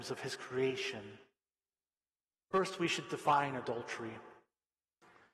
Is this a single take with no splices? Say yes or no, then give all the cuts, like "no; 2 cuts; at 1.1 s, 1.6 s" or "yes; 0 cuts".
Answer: yes; 0 cuts